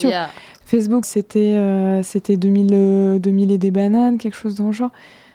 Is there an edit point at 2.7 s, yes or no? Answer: no